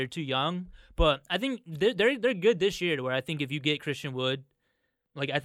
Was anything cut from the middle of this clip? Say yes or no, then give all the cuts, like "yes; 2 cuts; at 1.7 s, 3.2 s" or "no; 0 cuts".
no; 0 cuts